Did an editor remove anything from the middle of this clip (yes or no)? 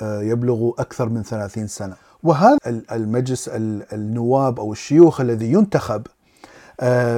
yes